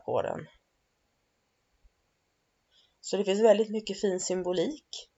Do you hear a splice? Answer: no; 0 cuts

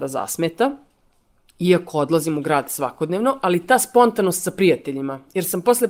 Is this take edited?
no; 0 cuts

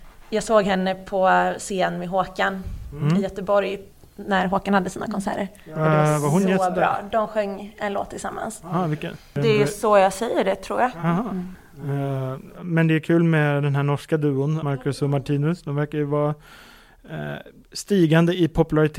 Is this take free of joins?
no; 1 cut; at 14.6 s

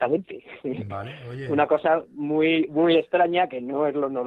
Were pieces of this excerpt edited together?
no; 0 cuts

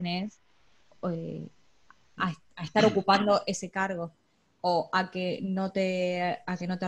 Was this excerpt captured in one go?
yes; 0 cuts

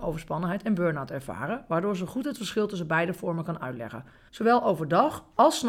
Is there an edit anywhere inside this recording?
yes; 1 cut; at 4.3 s

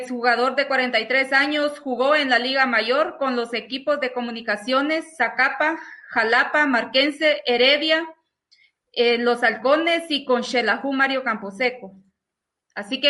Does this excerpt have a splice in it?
no; 0 cuts

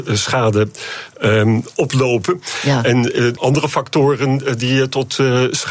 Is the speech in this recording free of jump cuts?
no; 1 cut; at 3.4 s

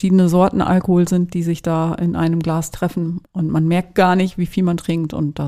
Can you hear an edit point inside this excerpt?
yes; 1 cut; at 3.3 s

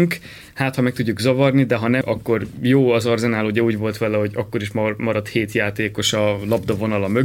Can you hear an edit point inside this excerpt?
yes; 1 cut; at 2.0 s

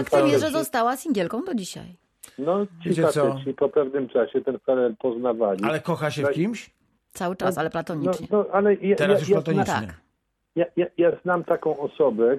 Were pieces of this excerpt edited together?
no; 0 cuts

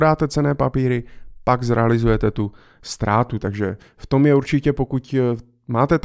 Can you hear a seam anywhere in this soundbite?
yes; 1 cut; at 3.4 s

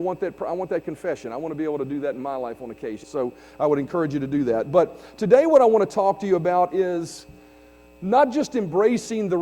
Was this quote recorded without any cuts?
no; 1 cut; at 3.0 s

